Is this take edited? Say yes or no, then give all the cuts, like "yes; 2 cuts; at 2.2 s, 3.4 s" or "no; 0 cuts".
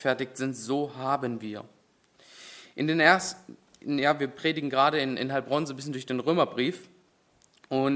no; 0 cuts